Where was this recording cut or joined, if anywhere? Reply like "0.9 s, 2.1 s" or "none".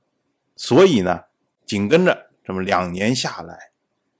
none